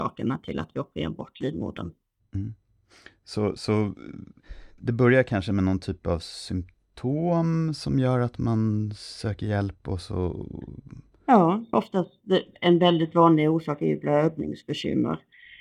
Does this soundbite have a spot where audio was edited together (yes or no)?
yes